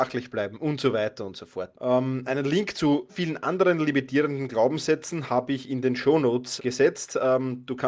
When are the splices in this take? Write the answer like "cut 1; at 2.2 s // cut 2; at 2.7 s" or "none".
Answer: cut 1; at 1.7 s // cut 2; at 3.1 s // cut 3; at 6.6 s